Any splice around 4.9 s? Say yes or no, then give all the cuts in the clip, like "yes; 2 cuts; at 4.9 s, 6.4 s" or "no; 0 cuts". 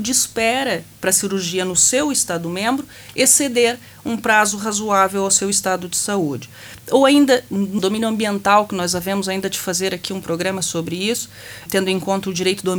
no; 2 cuts; at 7.8 s, 11.7 s